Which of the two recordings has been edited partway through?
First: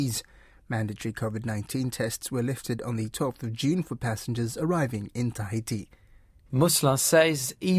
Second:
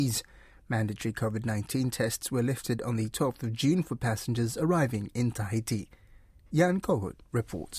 first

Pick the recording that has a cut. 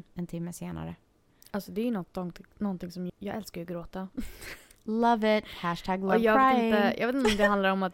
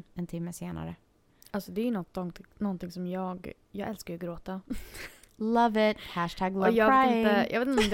first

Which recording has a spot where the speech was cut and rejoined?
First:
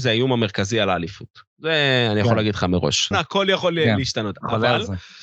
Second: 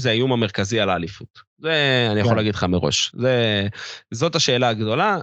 first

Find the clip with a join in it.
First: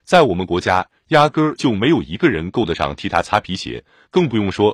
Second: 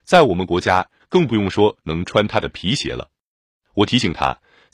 second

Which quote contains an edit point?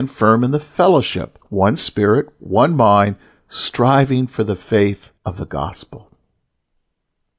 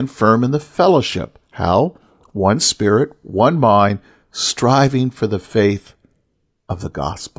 first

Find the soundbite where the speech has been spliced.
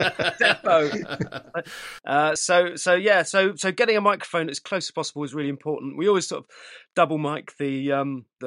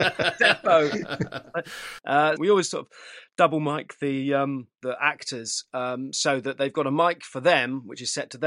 second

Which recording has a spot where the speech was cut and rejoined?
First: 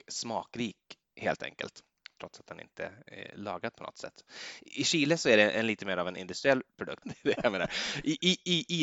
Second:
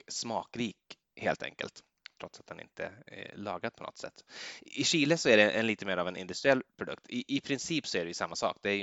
first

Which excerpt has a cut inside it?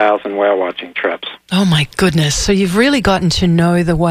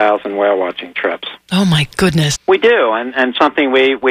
second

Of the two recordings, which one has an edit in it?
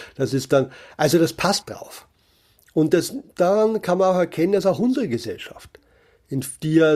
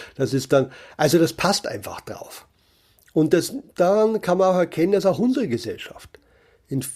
first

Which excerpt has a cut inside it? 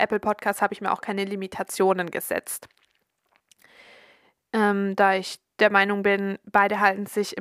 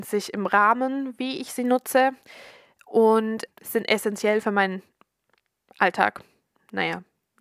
second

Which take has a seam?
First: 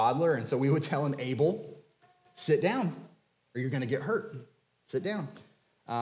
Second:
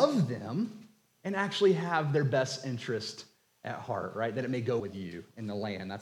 second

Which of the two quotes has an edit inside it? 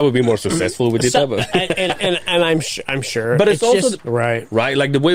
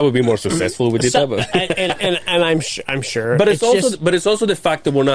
first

